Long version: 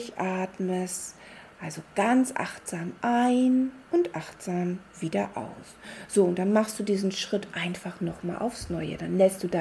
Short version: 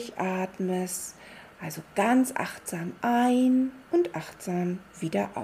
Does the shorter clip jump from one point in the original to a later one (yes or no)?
no